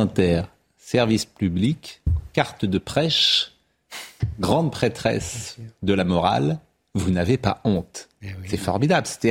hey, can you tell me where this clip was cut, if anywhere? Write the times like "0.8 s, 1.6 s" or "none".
4.2 s